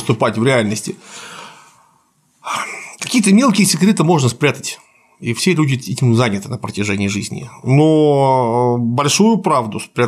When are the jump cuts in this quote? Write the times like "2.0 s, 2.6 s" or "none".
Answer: none